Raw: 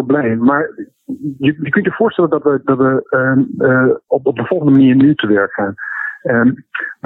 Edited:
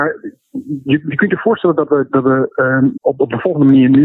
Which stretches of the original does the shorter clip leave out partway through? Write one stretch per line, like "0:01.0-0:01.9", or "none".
0:03.5-0:04.0